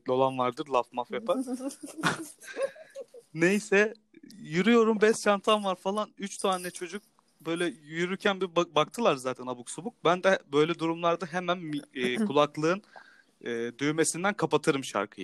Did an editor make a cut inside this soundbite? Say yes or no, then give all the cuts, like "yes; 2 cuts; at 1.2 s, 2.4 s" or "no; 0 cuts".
no; 0 cuts